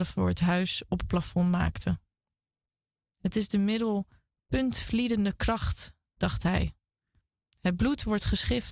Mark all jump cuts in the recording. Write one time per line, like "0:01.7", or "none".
0:03.0